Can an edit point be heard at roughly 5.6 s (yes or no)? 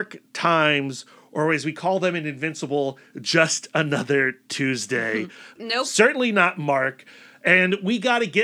yes